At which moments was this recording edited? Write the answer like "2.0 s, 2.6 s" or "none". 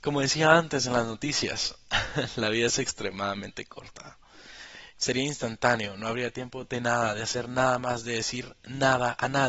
5.0 s